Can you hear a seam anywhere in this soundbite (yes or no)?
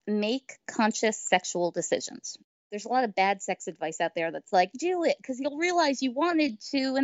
yes